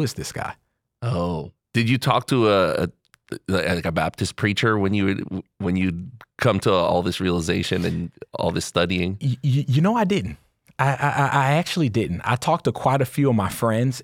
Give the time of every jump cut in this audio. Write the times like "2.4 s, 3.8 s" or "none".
none